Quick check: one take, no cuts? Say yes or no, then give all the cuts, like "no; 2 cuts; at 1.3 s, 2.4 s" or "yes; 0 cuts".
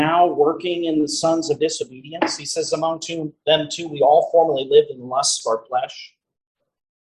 yes; 0 cuts